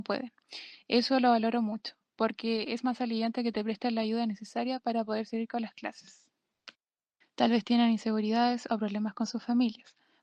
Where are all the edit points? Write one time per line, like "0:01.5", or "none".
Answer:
0:07.2